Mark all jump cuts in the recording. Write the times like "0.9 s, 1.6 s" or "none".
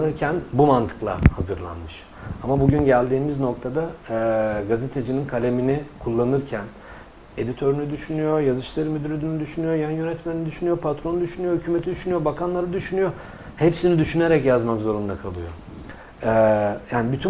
none